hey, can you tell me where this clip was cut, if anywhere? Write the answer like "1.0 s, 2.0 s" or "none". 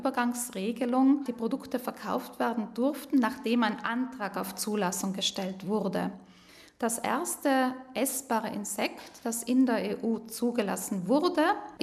none